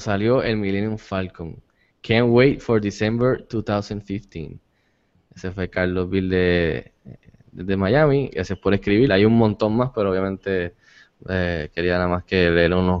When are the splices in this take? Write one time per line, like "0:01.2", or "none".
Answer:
0:09.1